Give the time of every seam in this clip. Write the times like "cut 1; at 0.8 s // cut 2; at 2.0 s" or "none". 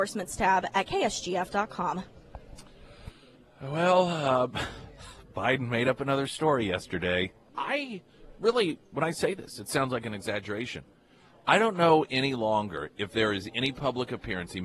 cut 1; at 7.5 s